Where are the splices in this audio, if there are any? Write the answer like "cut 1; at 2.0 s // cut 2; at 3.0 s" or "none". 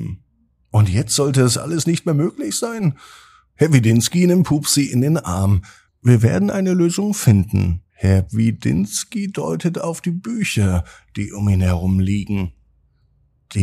cut 1; at 5.9 s // cut 2; at 7.9 s